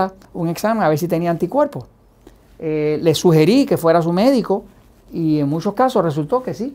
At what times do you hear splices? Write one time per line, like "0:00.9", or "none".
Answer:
0:04.9